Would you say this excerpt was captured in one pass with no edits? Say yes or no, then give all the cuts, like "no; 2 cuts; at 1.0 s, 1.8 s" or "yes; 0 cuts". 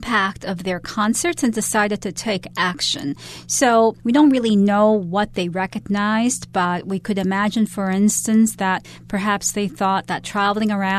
yes; 0 cuts